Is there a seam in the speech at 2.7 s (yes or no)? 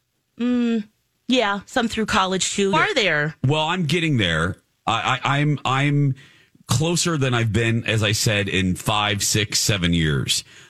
yes